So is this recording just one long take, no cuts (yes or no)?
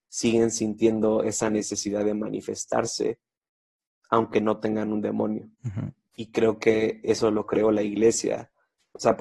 no